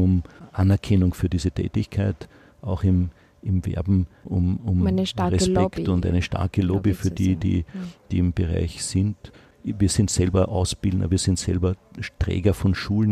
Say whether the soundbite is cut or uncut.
uncut